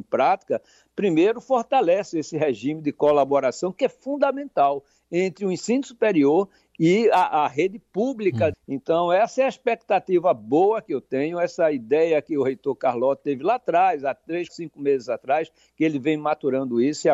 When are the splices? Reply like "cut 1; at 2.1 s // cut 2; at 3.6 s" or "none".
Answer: cut 1; at 8.5 s // cut 2; at 14.5 s